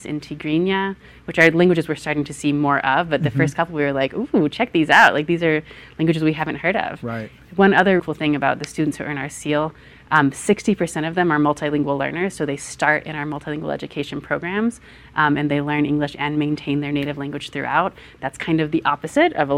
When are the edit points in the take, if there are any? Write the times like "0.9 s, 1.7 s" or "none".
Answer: 8.0 s